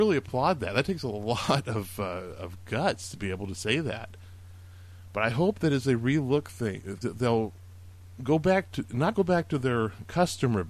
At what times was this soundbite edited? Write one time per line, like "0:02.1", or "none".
0:07.0
0:09.1